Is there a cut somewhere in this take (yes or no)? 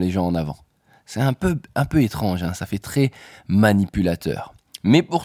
no